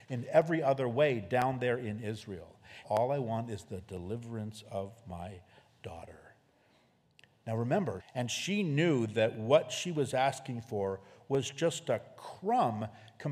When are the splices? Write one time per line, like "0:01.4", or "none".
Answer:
0:02.8
0:08.0